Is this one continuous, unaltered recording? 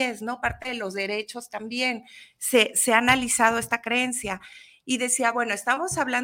yes; 0 cuts

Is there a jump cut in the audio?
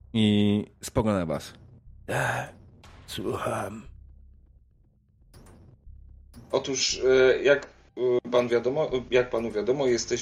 yes; 1 cut; at 6.4 s

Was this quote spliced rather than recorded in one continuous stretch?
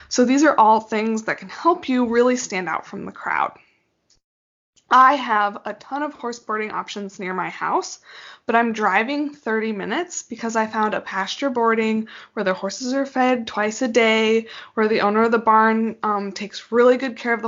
no; 0 cuts

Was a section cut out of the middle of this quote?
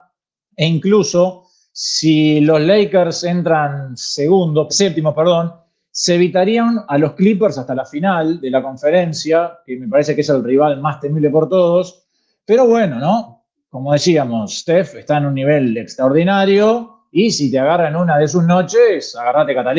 yes; 1 cut; at 4.7 s

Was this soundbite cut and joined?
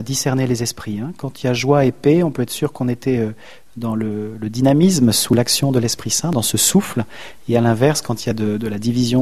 no; 0 cuts

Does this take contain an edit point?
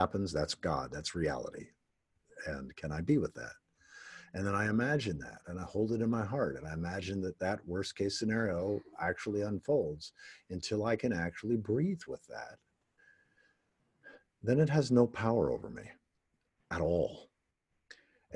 no; 0 cuts

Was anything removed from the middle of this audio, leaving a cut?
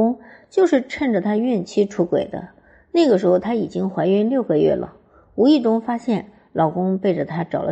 no; 0 cuts

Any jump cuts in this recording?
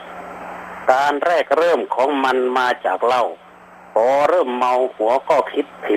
no; 0 cuts

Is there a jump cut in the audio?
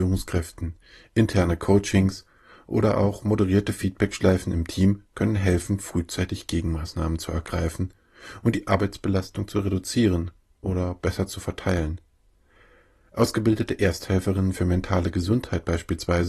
no; 0 cuts

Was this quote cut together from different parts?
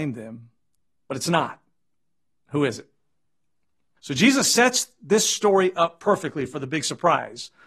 yes; 2 cuts; at 1.0 s, 4.0 s

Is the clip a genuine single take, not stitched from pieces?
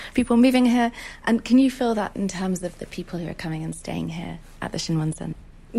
yes; 0 cuts

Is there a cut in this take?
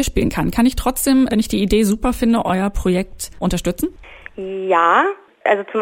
yes; 1 cut; at 1.3 s

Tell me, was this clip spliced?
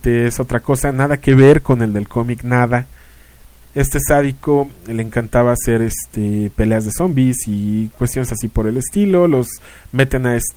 yes; 1 cut; at 3.6 s

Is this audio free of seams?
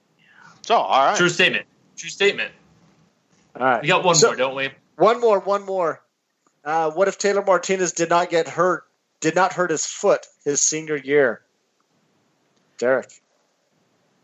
yes; 0 cuts

